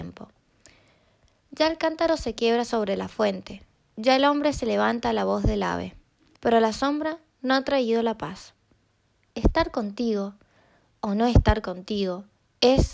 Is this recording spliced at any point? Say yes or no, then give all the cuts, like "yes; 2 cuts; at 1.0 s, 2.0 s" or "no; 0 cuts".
yes; 2 cuts; at 6.4 s, 9.3 s